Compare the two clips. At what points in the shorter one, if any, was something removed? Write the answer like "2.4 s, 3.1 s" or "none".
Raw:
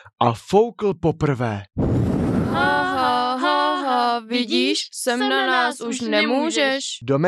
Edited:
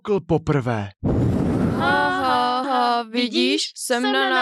2.6 s